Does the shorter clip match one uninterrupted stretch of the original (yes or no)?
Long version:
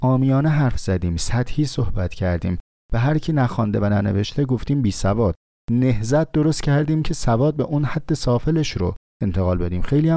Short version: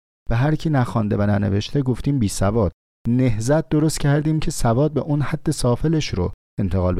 yes